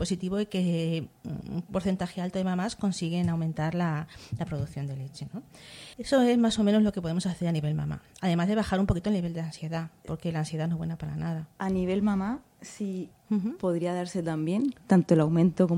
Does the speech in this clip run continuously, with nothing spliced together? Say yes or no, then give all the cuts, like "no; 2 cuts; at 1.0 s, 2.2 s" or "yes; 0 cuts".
no; 2 cuts; at 5.9 s, 13.1 s